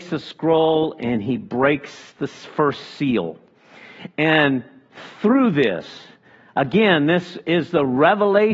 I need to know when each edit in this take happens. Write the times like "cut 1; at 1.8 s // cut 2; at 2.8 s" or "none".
none